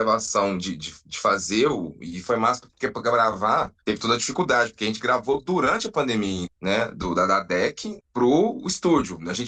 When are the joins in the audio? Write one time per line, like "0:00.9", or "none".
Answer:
0:03.8
0:06.5
0:08.0